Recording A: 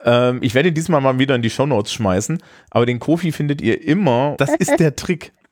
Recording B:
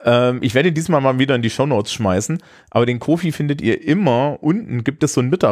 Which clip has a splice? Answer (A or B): A